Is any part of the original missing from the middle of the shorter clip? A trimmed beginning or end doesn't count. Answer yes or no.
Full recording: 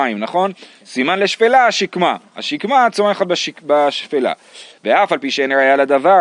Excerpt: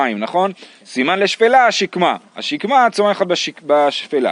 no